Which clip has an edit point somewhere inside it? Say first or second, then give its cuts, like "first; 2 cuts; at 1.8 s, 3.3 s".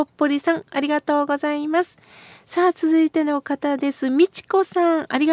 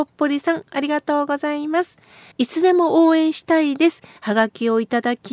second; 2 cuts; at 2.3 s, 4.2 s